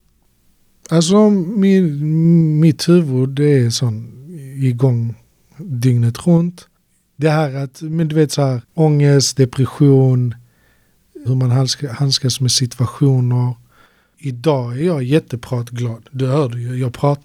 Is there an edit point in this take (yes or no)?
yes